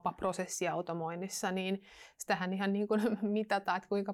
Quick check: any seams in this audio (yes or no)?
no